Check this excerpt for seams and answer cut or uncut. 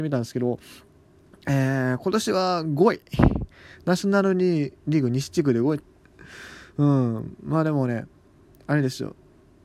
cut